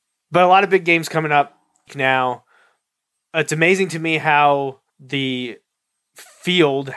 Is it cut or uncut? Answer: cut